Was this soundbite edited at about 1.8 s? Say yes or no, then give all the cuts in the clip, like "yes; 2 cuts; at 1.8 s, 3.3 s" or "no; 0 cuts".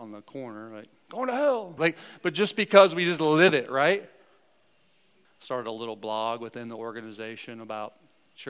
yes; 2 cuts; at 1.8 s, 5.2 s